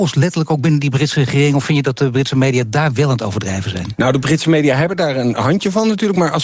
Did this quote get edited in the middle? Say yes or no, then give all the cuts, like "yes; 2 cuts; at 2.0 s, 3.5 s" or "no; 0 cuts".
no; 0 cuts